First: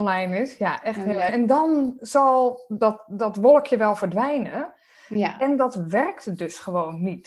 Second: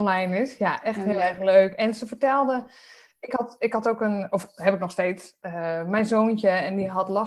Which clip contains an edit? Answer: first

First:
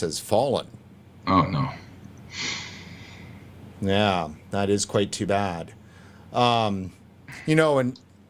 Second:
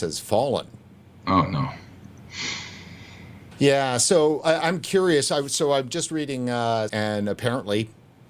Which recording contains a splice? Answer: second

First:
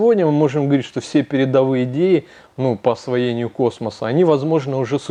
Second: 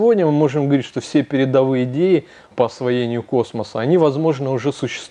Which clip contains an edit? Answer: second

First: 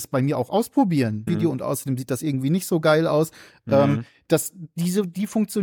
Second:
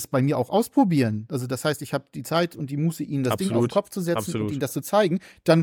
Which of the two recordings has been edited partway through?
first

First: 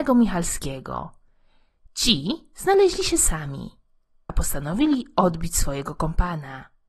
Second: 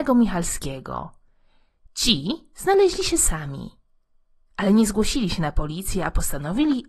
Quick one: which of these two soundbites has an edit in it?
first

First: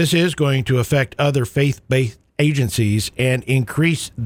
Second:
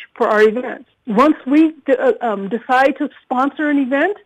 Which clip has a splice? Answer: second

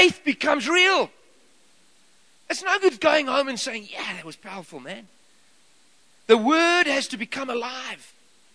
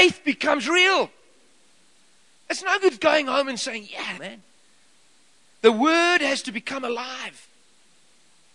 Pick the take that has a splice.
second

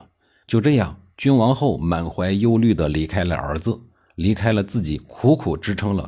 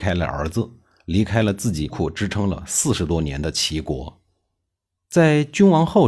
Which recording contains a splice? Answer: second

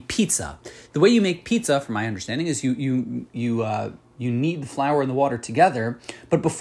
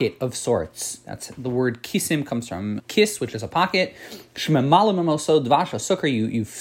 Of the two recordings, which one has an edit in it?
second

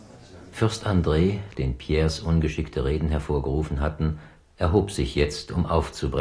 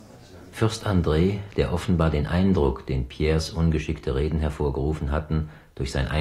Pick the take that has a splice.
first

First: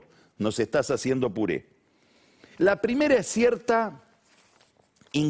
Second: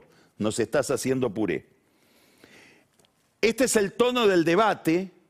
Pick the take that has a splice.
first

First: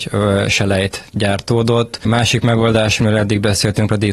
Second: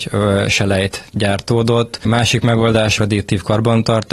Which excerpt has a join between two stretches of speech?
second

